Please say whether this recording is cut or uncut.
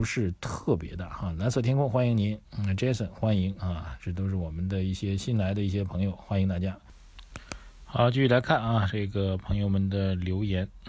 uncut